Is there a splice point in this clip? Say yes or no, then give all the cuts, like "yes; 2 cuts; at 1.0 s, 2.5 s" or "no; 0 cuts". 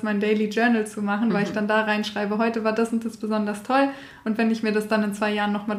no; 0 cuts